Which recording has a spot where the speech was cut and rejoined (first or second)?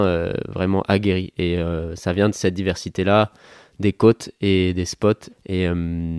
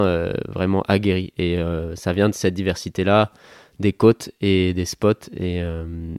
first